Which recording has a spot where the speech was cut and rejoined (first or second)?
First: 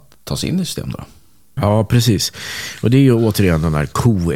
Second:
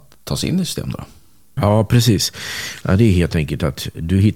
second